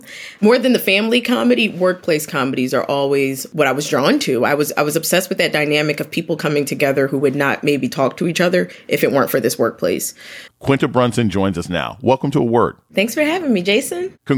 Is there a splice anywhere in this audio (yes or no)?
yes